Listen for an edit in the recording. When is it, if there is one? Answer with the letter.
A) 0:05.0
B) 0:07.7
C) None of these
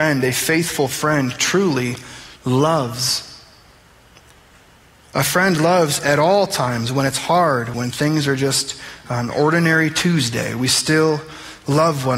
B